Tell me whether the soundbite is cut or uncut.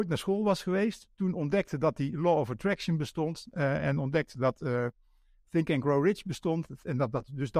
uncut